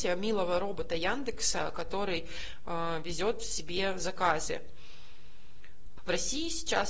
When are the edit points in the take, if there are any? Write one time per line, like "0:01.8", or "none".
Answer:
0:06.0